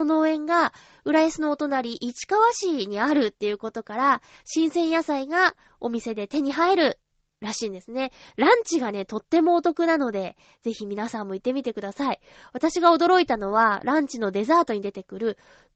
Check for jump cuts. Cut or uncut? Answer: cut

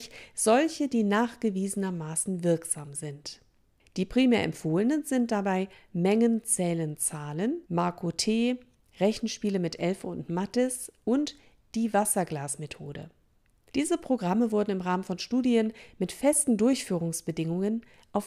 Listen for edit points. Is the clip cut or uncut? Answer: cut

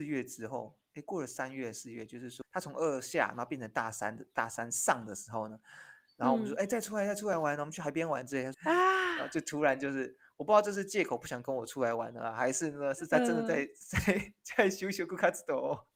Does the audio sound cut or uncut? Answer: cut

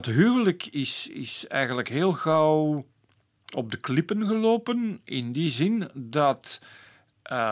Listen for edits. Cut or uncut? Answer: uncut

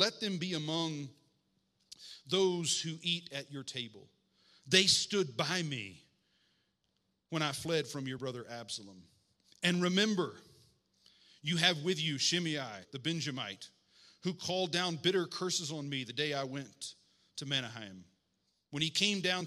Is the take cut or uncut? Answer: cut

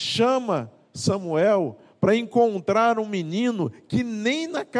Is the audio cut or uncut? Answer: uncut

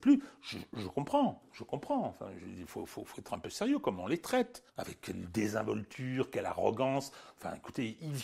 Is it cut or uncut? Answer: cut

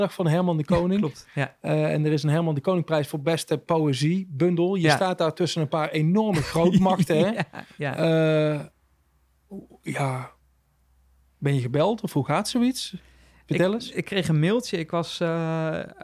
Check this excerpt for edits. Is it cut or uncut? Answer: uncut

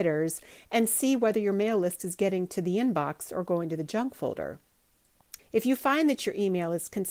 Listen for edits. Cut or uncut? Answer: cut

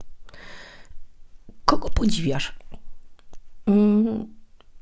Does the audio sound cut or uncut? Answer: uncut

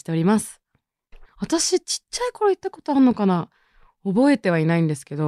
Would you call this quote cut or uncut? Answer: cut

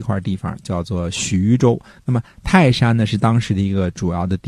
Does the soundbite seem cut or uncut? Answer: uncut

